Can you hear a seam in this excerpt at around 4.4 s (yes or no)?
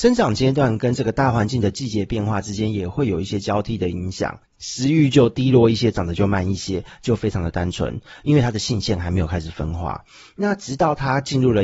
yes